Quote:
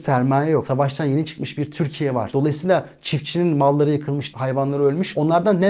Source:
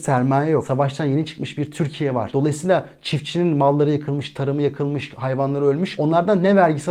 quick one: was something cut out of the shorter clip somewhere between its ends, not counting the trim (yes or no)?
yes